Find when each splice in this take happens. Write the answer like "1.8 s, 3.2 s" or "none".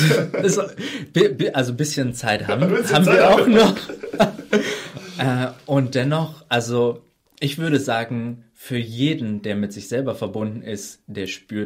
none